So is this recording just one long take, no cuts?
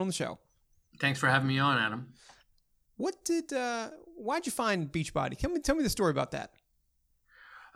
yes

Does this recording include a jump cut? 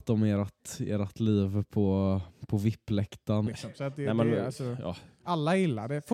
yes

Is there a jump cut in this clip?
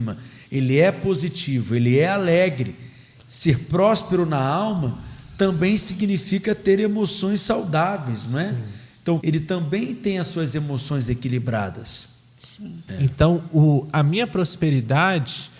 yes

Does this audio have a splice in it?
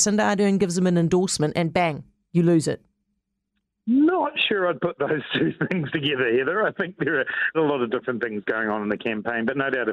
yes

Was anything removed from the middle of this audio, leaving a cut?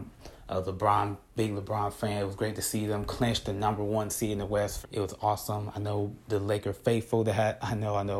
yes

